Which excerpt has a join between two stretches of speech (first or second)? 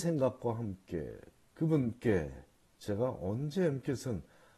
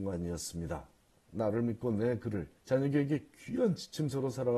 second